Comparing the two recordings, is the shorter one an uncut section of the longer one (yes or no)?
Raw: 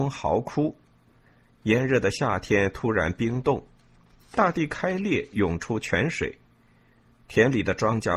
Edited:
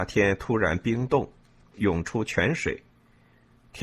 no